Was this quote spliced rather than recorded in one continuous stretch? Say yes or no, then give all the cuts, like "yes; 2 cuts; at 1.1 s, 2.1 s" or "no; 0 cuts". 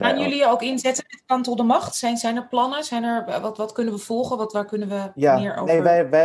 no; 0 cuts